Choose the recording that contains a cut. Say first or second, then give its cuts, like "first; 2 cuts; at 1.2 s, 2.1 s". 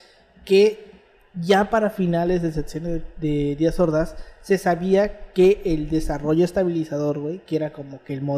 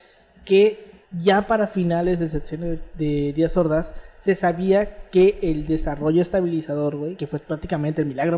second; 2 cuts; at 1.0 s, 7.2 s